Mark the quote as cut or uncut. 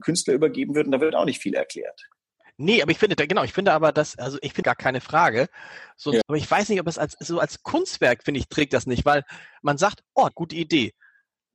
cut